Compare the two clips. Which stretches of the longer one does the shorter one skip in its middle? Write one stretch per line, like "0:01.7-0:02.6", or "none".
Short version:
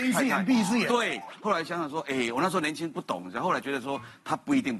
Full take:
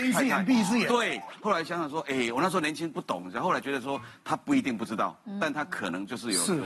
none